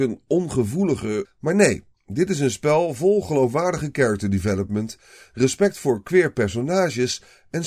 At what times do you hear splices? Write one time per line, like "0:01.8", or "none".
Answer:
0:01.2